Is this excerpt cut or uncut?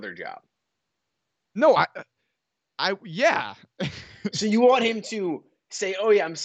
uncut